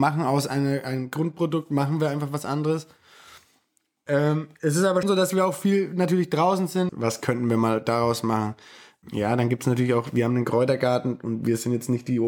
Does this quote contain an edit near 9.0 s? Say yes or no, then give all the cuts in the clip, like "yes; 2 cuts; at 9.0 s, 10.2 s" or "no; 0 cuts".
no; 2 cuts; at 5.0 s, 6.9 s